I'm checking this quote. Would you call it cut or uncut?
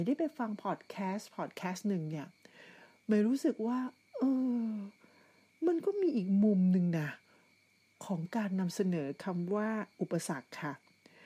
uncut